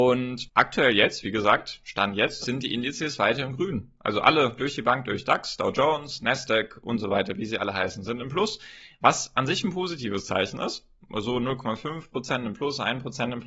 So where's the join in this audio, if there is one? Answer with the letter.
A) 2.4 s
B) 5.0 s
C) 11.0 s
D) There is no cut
A